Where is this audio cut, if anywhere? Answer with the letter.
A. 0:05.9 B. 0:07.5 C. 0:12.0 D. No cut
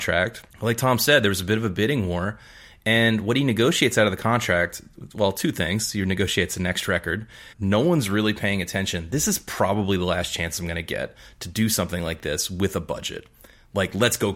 B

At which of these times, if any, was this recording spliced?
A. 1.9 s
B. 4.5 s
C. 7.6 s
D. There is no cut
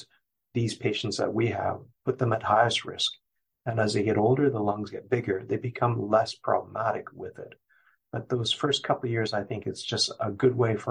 A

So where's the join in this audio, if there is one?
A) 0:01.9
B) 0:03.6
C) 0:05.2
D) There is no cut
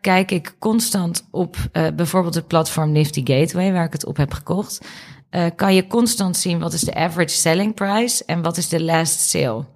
D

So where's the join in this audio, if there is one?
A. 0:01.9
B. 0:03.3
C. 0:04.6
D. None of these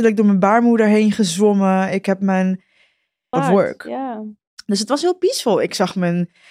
B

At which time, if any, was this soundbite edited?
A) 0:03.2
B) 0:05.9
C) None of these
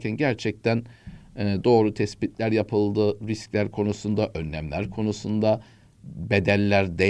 C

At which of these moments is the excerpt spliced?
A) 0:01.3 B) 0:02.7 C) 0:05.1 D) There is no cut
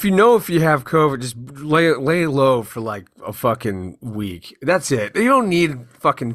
D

